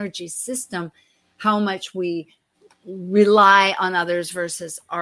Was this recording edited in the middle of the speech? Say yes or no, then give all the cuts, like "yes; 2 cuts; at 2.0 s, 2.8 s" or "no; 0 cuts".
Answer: no; 0 cuts